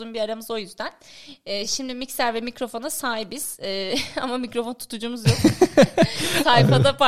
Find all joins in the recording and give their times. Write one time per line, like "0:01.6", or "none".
none